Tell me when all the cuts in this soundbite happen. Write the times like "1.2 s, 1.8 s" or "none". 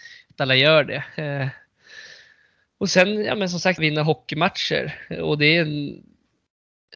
3.8 s